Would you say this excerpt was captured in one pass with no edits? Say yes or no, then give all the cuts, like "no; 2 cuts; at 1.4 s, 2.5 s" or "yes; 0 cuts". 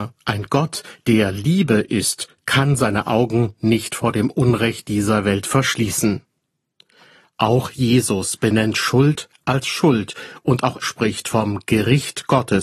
no; 1 cut; at 10.8 s